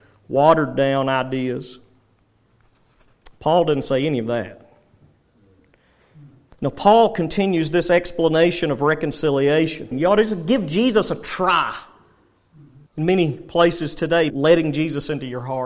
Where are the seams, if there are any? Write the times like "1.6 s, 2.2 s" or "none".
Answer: 9.9 s, 12.9 s, 14.3 s